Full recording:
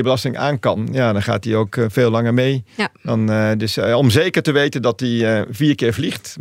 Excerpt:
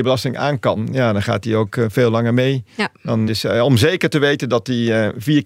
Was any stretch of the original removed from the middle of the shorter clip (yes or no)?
yes